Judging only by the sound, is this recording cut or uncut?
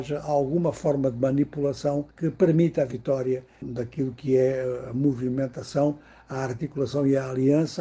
cut